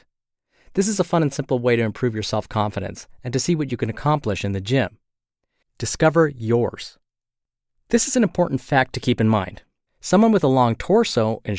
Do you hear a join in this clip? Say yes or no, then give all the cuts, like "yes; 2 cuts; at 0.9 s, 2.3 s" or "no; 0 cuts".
yes; 2 cuts; at 5.6 s, 9.9 s